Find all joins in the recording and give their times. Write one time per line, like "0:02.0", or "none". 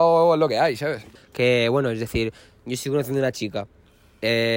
0:01.2